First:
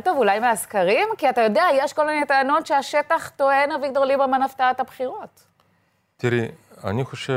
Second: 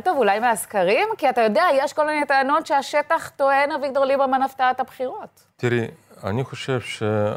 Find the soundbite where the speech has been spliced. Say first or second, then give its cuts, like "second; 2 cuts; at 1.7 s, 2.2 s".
second; 1 cut; at 5.5 s